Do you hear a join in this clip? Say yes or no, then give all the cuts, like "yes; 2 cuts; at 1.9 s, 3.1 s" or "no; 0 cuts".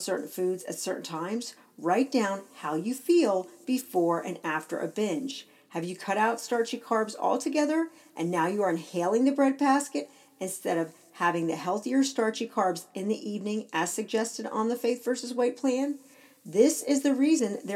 no; 0 cuts